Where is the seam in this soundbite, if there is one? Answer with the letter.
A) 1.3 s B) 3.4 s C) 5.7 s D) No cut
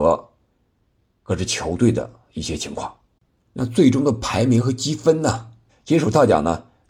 C